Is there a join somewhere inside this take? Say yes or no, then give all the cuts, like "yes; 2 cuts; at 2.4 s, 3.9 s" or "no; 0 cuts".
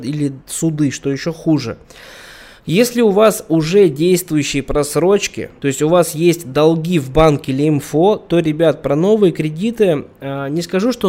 yes; 1 cut; at 5.6 s